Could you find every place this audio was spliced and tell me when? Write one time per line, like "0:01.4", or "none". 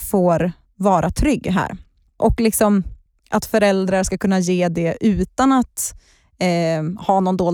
0:02.2